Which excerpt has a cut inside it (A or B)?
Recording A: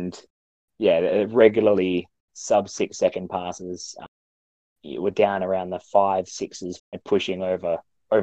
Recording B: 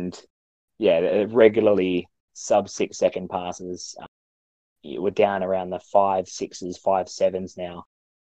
A